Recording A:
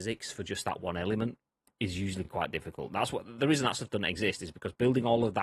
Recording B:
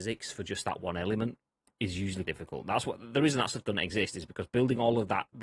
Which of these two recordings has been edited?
B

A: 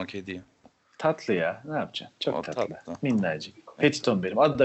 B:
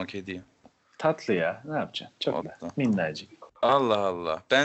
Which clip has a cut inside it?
B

